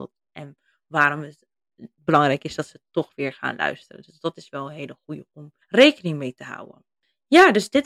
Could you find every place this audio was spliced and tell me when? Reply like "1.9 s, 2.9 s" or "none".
5.6 s